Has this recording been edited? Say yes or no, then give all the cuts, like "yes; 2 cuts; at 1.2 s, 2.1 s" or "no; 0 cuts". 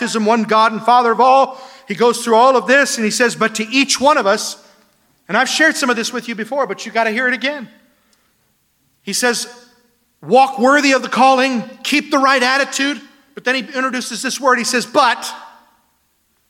no; 0 cuts